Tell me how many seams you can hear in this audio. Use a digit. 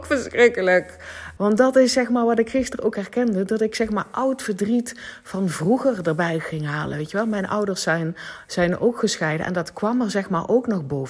1